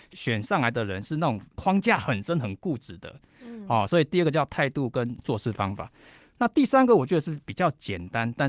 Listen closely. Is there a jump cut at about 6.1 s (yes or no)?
no